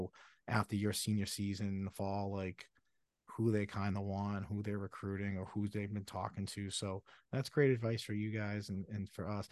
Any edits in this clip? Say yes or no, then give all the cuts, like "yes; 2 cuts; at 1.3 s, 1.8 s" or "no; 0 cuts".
no; 0 cuts